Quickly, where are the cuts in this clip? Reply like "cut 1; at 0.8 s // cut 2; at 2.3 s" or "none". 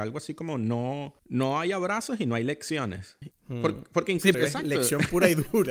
cut 1; at 1.2 s // cut 2; at 3.3 s // cut 3; at 4.3 s